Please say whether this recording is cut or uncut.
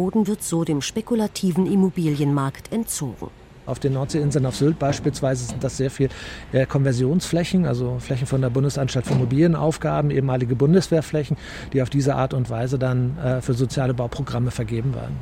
uncut